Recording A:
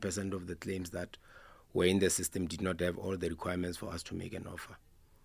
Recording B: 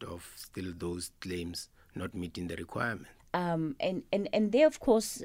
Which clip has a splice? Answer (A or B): B